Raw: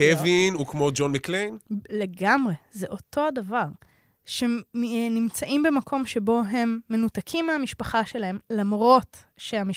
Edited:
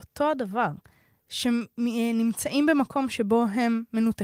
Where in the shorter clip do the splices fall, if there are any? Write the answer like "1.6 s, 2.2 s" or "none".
none